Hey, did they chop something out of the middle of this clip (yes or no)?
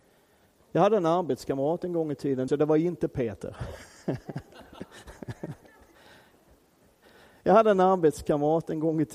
yes